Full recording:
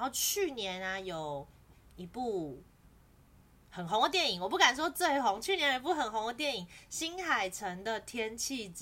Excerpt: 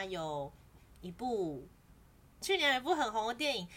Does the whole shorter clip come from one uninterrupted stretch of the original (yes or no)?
no